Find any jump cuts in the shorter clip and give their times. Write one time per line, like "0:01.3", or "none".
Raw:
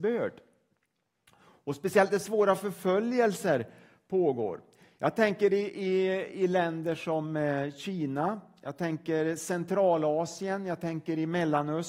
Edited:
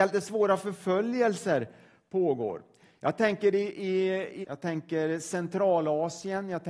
0:04.4